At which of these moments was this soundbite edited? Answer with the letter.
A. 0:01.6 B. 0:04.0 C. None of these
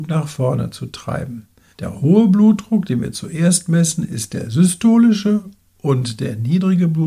C